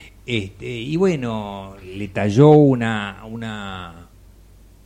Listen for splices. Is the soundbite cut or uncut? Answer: uncut